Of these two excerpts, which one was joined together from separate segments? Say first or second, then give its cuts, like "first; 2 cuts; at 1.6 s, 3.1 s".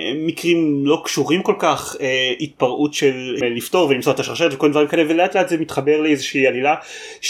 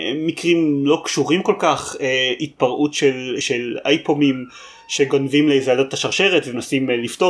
first; 1 cut; at 3.4 s